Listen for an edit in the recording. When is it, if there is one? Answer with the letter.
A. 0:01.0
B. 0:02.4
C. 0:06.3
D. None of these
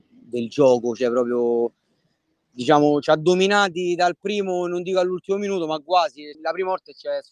C